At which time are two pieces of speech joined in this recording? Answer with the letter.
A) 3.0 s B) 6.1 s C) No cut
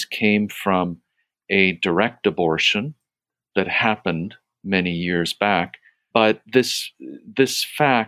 B